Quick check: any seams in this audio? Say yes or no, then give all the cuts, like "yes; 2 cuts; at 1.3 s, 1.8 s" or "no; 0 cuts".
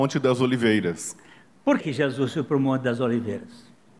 yes; 1 cut; at 1.8 s